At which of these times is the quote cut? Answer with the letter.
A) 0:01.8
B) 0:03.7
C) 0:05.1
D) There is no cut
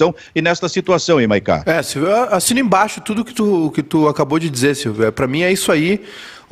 D